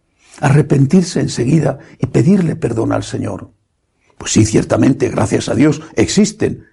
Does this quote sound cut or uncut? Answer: uncut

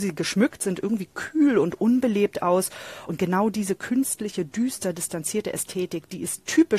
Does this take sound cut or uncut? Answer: uncut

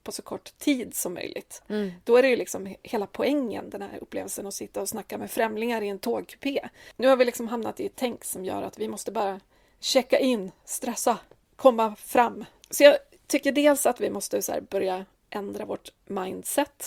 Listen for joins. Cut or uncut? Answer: cut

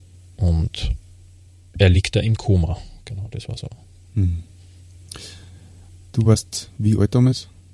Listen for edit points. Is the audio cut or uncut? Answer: uncut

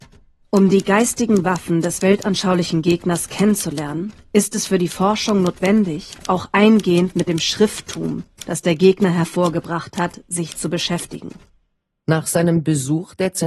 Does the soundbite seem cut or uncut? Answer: uncut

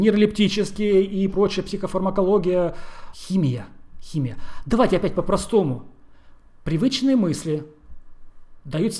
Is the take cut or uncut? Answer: cut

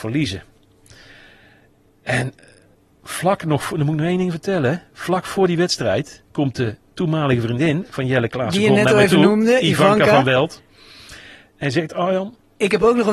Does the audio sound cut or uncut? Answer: uncut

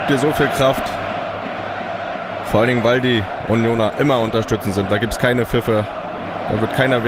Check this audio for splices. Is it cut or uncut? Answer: uncut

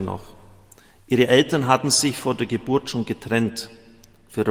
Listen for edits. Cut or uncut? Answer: uncut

